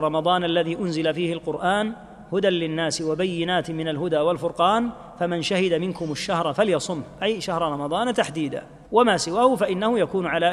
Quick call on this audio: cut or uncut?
cut